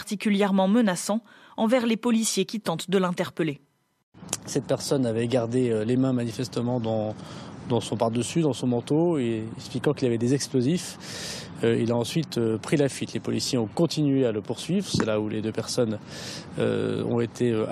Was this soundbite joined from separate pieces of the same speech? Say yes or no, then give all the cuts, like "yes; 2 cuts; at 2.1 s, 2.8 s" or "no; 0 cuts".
no; 0 cuts